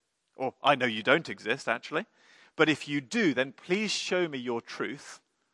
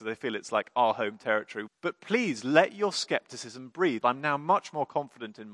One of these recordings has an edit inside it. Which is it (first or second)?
second